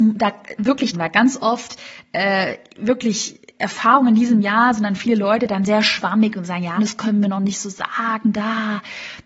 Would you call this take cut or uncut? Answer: cut